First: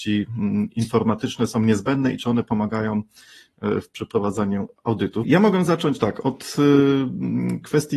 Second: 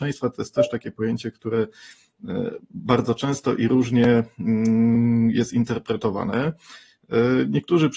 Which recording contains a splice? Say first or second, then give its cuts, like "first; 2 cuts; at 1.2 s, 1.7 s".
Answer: first; 1 cut; at 5.2 s